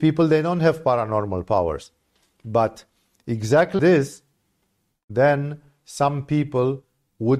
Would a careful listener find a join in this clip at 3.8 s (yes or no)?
yes